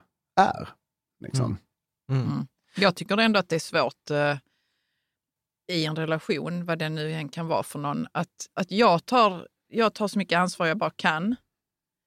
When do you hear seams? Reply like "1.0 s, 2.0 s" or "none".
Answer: 9.7 s